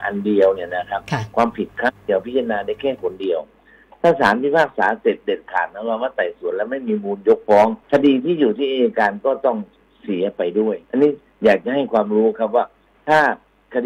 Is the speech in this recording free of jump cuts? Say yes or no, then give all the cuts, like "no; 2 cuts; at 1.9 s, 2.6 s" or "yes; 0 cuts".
no; 2 cuts; at 7.8 s, 10.8 s